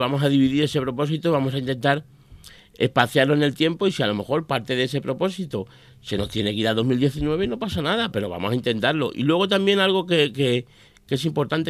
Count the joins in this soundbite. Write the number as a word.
one